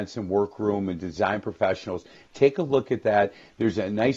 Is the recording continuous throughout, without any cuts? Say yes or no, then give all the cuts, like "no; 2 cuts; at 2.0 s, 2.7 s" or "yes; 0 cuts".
yes; 0 cuts